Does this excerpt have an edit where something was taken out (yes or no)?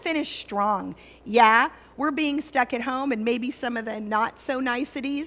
no